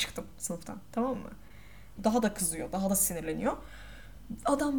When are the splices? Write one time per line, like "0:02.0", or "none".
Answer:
0:02.0